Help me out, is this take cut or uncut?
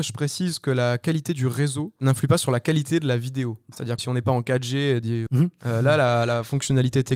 cut